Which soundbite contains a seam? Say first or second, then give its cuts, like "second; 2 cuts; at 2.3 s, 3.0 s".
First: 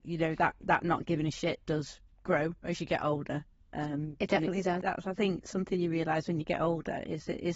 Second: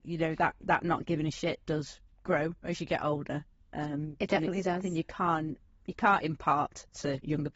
first; 1 cut; at 4.8 s